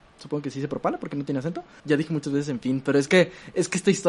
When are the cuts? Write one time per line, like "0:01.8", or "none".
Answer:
0:01.8